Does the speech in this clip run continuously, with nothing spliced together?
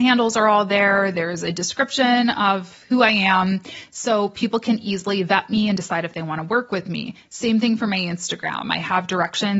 yes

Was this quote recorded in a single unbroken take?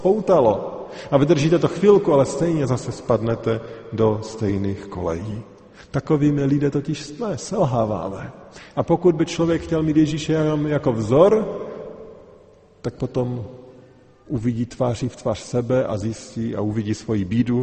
yes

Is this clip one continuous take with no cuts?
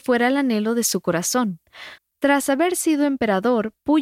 no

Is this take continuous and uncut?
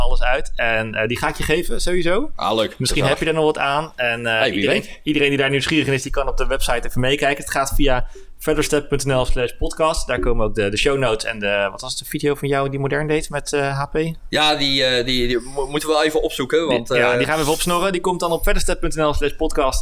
yes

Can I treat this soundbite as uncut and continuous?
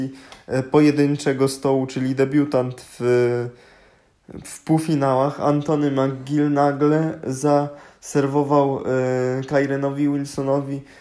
yes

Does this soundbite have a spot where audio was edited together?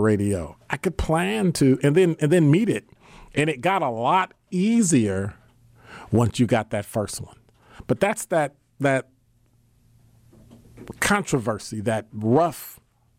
no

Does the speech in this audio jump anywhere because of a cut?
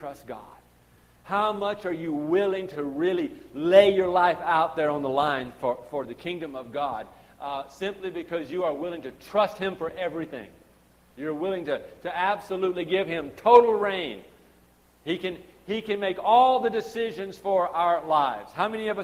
no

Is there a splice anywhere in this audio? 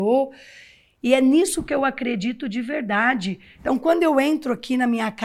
no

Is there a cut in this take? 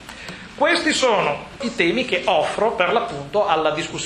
yes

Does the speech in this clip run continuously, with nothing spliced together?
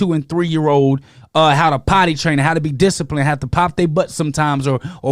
yes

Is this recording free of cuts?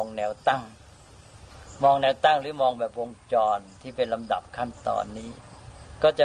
yes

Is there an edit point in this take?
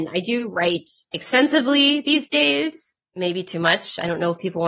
no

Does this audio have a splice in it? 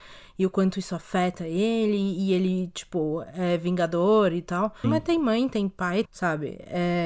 yes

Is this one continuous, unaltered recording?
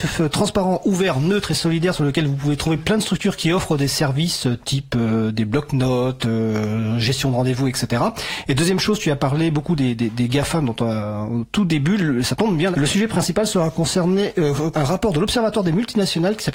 no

